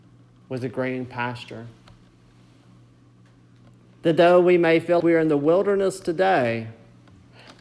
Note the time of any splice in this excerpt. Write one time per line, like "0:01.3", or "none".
0:05.0